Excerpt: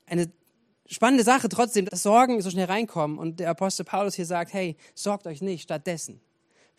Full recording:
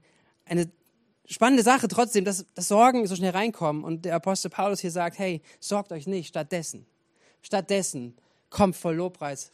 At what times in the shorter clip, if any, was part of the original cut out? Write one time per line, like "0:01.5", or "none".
0:01.9